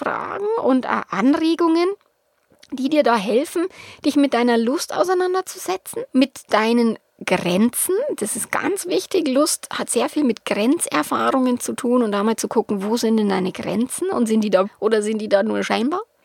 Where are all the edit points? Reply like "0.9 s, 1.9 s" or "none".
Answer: 6.1 s, 14.6 s